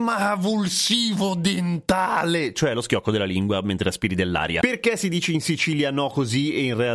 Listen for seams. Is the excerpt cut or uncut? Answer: uncut